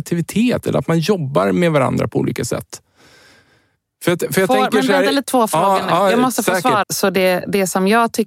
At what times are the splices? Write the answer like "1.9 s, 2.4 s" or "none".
5.2 s, 6.8 s